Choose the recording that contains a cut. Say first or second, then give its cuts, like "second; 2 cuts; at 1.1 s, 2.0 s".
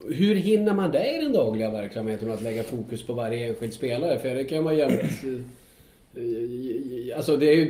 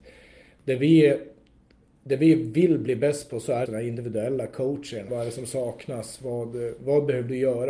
second; 2 cuts; at 3.7 s, 5.1 s